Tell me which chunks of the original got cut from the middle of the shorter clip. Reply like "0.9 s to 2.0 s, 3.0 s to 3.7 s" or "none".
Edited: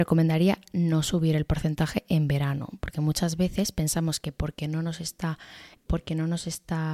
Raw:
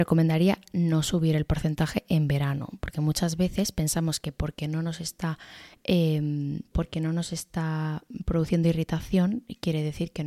5.8 s to 6.7 s